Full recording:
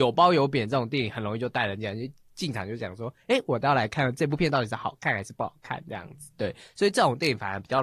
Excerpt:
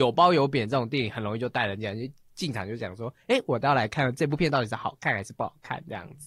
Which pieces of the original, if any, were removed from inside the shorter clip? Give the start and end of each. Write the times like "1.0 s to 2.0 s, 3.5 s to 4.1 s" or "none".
none